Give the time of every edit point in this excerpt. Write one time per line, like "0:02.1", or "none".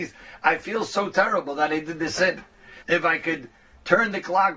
0:02.8